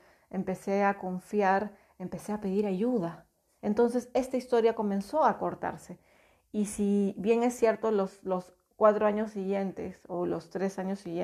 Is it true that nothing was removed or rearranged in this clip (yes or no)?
no